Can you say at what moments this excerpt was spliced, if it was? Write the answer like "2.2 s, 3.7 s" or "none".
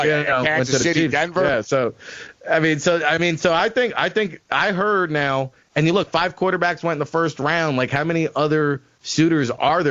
none